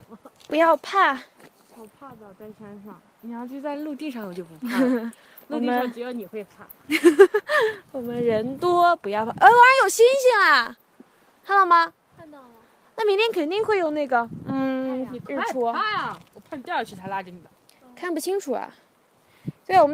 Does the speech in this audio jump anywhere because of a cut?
no; 0 cuts

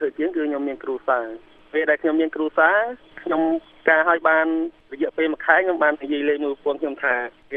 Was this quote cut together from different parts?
yes; 1 cut; at 5.9 s

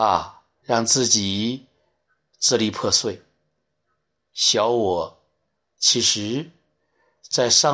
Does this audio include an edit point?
no; 0 cuts

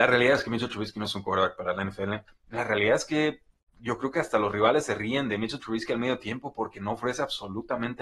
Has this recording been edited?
yes; 1 cut; at 2.3 s

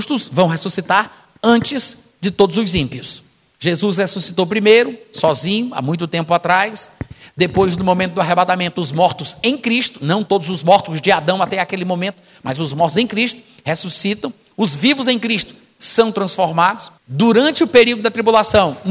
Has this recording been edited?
yes; 1 cut; at 17.0 s

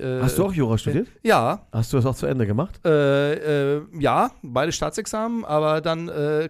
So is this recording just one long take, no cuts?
yes; 0 cuts

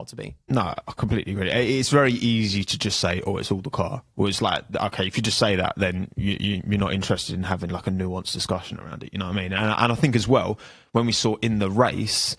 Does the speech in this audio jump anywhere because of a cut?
no; 0 cuts

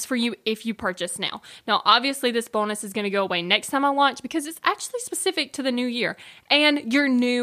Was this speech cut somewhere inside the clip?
no; 0 cuts

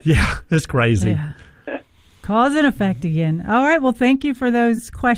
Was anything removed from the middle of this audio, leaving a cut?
no; 0 cuts

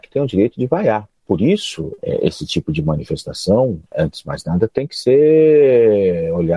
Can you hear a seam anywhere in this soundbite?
no; 0 cuts

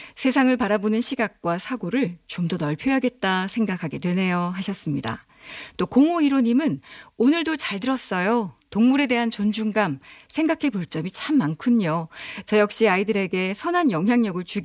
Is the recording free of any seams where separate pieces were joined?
yes; 0 cuts

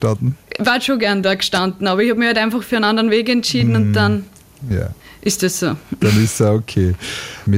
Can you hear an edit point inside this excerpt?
no; 0 cuts

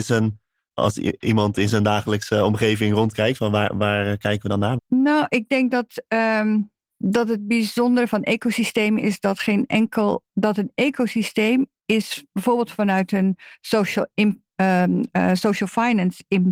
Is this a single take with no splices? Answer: no; 1 cut; at 4.8 s

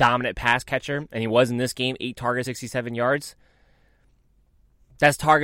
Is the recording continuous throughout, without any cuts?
no; 1 cut; at 2.4 s

